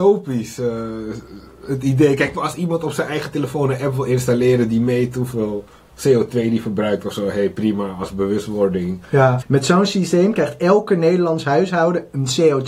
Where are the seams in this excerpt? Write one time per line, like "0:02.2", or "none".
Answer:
0:02.3
0:09.4